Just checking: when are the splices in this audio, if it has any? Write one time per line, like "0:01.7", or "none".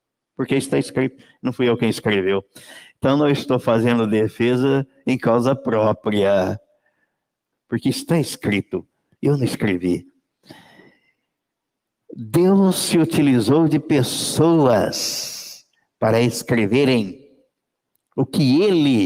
0:07.5